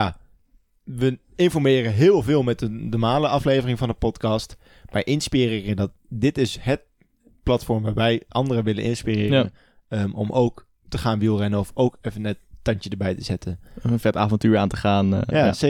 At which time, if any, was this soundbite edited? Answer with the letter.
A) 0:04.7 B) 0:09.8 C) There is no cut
C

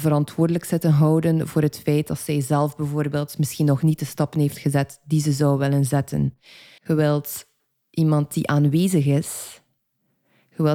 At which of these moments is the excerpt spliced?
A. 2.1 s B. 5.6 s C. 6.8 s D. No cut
C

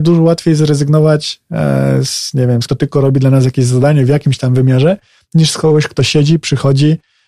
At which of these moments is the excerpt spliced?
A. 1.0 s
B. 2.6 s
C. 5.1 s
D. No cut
B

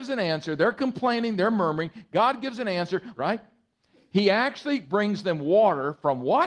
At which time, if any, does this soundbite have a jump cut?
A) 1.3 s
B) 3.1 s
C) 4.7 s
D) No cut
B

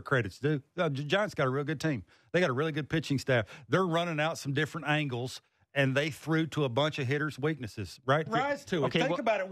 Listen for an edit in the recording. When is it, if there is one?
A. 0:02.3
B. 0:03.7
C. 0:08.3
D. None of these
C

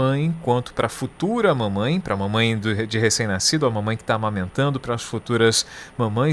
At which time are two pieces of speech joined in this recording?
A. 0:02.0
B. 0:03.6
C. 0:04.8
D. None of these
D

